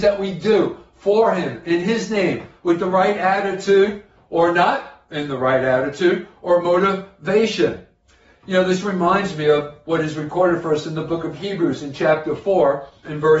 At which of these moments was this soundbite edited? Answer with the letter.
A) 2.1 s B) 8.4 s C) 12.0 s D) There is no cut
D